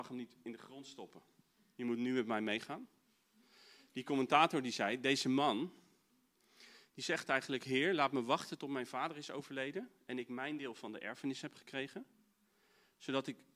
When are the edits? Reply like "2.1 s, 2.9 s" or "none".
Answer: none